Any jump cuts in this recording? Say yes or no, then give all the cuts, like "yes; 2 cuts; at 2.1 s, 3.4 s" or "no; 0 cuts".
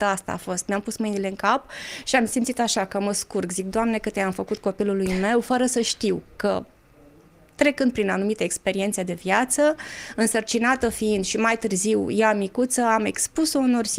no; 0 cuts